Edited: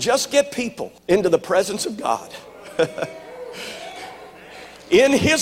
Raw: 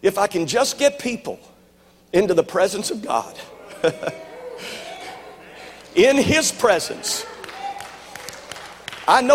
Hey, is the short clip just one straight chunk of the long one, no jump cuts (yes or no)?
no